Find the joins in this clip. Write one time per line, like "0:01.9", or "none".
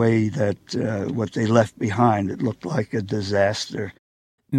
none